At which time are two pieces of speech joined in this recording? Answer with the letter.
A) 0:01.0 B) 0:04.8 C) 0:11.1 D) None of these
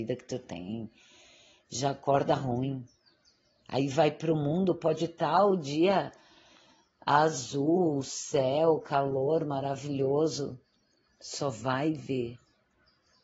C